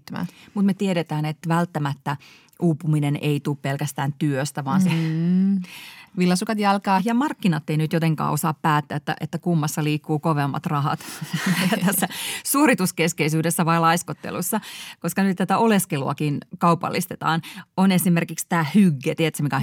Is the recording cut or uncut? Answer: cut